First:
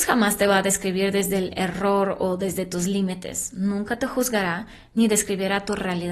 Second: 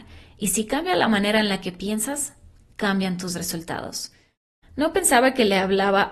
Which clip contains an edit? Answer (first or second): second